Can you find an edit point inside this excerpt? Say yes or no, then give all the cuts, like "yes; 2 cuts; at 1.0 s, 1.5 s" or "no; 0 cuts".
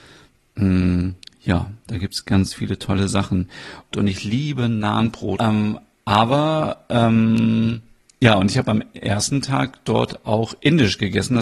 yes; 2 cuts; at 3.9 s, 5.4 s